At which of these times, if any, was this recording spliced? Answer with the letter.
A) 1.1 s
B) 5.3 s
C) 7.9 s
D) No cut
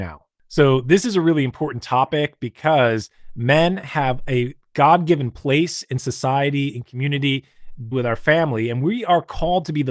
C